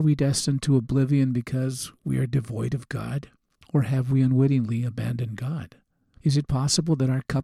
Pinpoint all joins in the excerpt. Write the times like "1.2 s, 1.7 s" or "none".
3.5 s